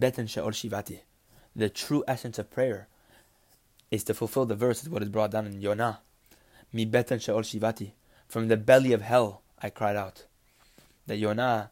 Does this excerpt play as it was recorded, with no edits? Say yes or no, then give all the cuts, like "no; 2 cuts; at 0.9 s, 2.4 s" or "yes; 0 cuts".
yes; 0 cuts